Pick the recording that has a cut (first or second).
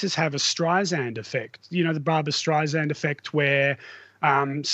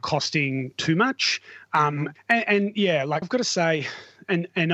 second